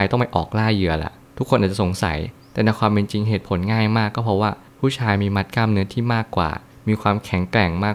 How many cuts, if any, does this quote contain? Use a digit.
0